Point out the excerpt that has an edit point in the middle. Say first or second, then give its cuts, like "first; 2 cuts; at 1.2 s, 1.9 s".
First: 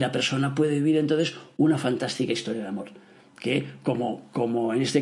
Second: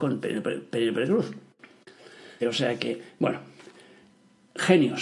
second; 1 cut; at 2.4 s